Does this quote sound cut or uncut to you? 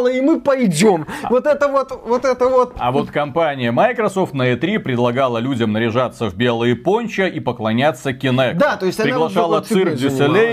uncut